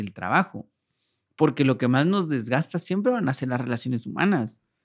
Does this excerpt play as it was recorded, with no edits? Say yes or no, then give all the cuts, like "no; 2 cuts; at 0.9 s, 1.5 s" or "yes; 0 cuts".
yes; 0 cuts